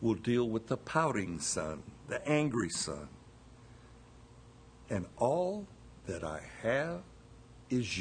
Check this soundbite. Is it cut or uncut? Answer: cut